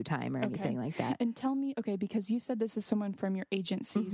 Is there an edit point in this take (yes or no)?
no